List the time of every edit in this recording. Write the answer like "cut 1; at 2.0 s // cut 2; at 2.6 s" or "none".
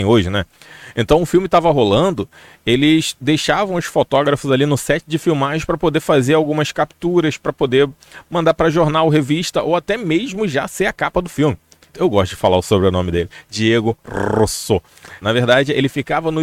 cut 1; at 11.9 s // cut 2; at 15.2 s